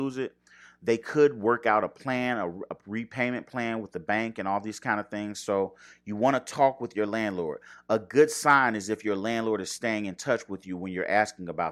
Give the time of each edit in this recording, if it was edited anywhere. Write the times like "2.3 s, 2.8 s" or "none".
none